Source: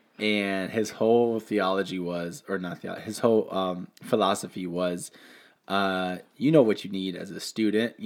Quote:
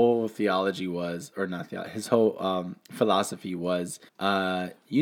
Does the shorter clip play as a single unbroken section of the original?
no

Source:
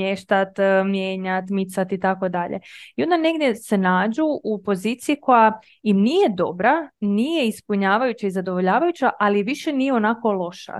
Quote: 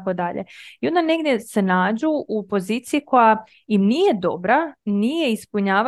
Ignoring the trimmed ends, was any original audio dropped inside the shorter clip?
no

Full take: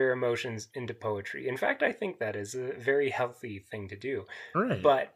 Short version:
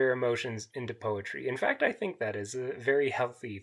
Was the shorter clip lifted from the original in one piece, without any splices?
yes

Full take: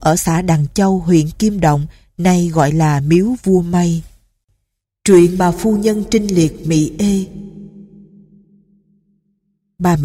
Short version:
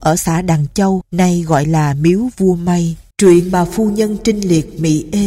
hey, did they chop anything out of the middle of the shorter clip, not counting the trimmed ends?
yes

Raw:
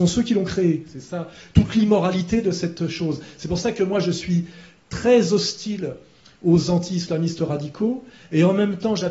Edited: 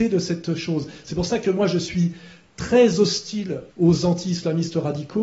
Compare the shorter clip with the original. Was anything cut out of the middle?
yes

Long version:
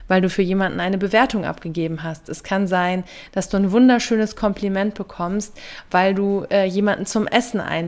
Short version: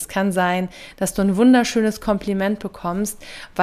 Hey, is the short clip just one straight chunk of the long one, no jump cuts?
yes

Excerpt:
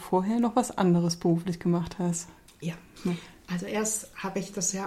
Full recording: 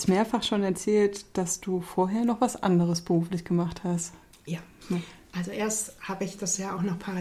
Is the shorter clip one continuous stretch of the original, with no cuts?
yes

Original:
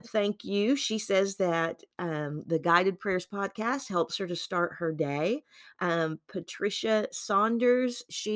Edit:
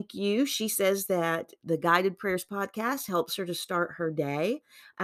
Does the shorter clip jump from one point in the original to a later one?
yes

